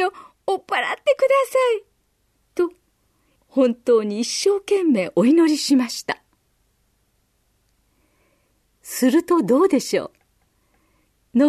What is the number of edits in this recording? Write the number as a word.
one